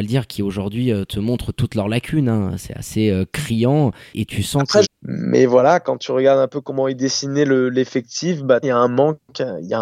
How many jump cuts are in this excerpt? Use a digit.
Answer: 2